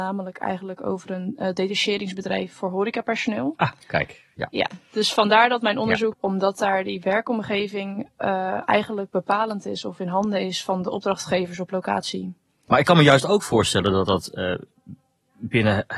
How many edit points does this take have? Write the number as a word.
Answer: two